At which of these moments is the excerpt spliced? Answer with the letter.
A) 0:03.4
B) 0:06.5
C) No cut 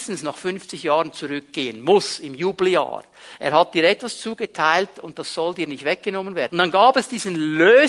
B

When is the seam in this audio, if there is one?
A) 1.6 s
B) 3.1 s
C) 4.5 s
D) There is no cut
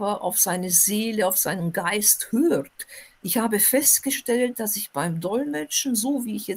B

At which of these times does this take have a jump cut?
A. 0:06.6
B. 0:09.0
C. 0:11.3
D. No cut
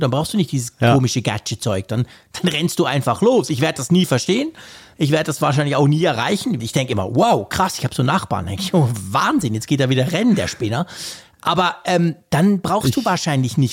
A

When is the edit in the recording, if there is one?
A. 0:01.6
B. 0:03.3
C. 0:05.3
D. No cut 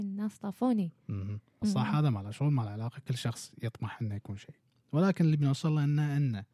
A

